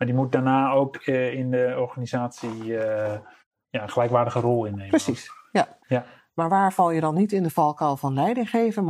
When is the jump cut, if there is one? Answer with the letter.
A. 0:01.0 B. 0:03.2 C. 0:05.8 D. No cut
C